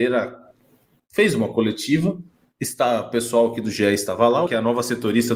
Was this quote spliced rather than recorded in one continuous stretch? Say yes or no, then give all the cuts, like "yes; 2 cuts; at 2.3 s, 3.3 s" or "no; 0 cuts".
yes; 1 cut; at 4.5 s